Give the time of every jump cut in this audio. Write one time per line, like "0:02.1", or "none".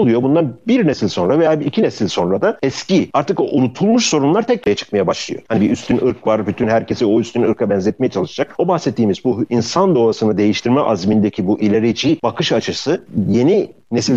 0:05.4